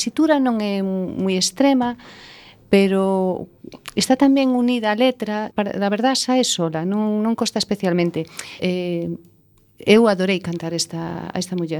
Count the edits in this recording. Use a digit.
2